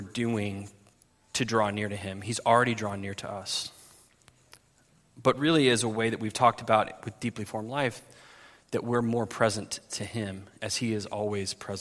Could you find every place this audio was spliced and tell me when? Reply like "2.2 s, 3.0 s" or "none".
none